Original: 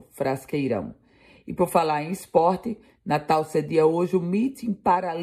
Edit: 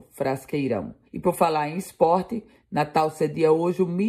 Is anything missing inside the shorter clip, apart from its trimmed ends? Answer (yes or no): yes